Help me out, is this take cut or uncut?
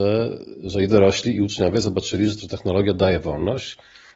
uncut